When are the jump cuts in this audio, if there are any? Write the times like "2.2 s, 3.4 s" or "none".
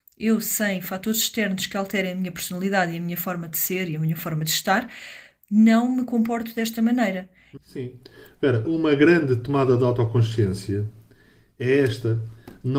7.6 s, 8.6 s